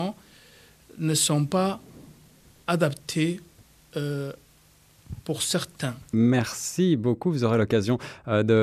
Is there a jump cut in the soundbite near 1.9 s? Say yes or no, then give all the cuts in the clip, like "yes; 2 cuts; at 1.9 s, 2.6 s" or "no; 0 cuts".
no; 1 cut; at 6.1 s